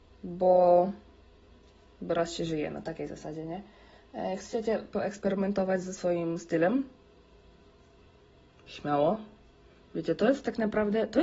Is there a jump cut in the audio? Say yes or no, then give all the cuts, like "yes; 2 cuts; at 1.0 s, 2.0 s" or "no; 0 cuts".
no; 0 cuts